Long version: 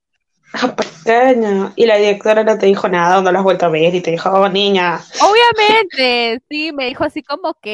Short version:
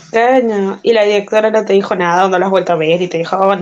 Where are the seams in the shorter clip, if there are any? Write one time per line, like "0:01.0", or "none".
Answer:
none